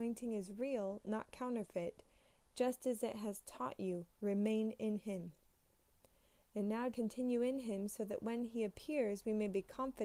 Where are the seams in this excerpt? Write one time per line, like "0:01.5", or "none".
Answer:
0:06.9